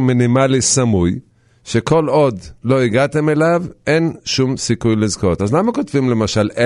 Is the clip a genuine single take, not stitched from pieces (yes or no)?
yes